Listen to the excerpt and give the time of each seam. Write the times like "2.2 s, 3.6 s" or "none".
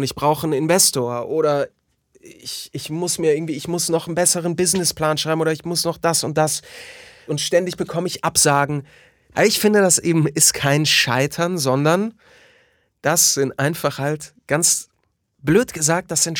7.3 s, 9.3 s